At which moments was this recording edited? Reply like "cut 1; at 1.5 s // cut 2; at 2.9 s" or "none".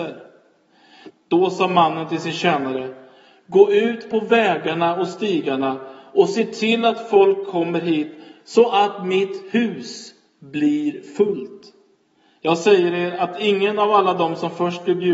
cut 1; at 1.1 s